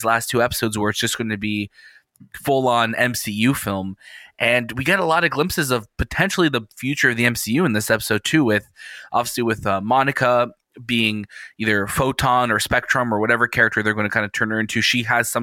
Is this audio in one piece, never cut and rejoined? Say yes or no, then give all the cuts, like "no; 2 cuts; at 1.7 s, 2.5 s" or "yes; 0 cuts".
yes; 0 cuts